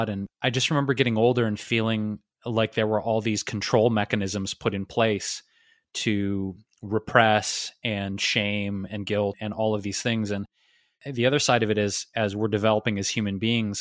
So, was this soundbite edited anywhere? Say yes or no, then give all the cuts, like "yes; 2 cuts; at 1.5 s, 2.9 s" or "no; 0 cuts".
no; 0 cuts